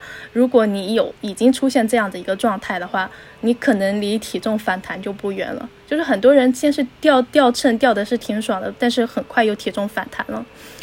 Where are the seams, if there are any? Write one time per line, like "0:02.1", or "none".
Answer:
0:01.2